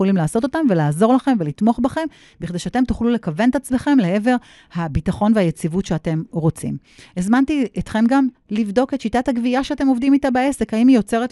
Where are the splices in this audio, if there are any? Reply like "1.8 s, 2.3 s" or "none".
none